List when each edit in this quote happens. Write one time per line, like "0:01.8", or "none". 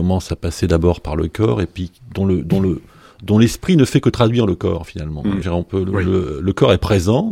0:05.4